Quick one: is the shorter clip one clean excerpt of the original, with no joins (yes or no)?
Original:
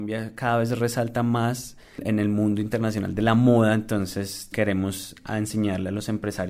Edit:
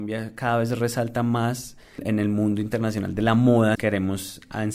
no